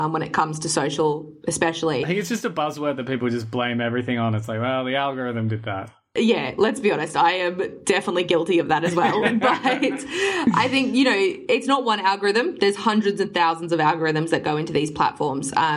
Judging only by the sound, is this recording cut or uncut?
uncut